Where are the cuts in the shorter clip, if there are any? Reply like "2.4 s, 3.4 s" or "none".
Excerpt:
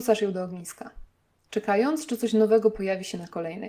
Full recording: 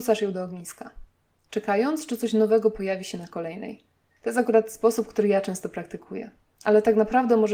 none

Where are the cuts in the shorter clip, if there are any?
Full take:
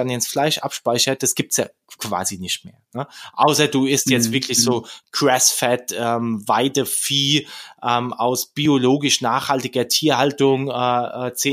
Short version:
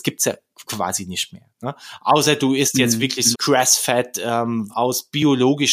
3.3 s, 4.7 s

